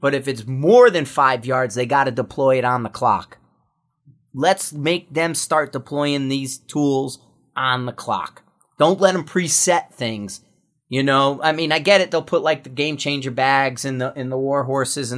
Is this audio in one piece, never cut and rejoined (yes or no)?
yes